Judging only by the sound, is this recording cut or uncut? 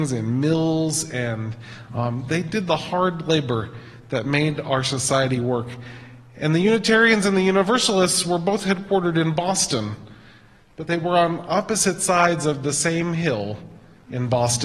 uncut